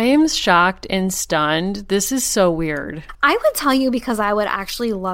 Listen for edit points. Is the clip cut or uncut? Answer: cut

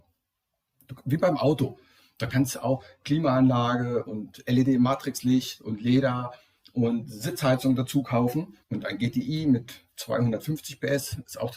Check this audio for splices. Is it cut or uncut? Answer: cut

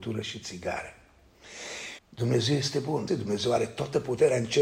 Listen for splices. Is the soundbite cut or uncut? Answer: cut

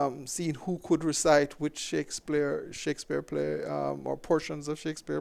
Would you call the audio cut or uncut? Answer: uncut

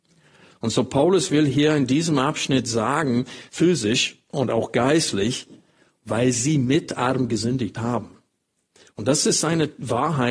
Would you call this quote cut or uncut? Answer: cut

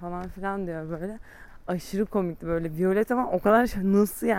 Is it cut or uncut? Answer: uncut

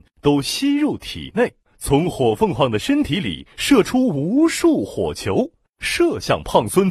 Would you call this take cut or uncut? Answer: cut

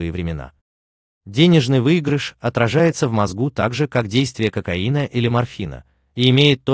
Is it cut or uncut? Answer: cut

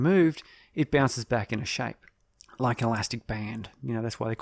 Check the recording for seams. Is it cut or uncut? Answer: uncut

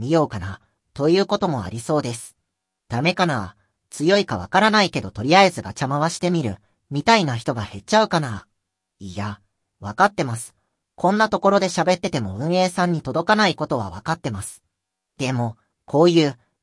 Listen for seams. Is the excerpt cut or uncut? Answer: uncut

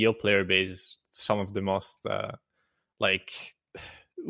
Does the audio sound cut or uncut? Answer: uncut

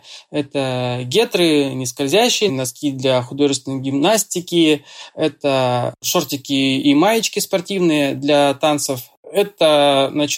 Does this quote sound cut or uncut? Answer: cut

